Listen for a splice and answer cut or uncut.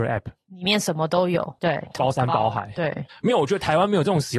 cut